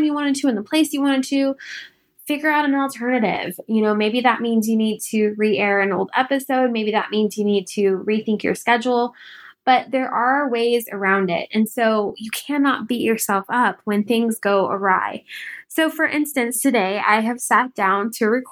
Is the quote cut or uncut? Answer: uncut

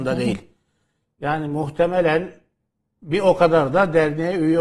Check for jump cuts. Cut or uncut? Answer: uncut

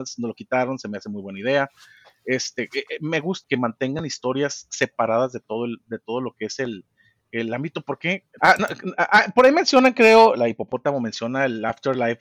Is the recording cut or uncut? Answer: cut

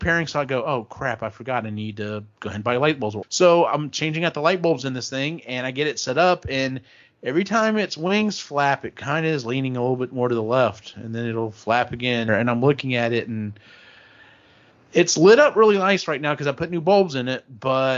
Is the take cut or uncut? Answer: cut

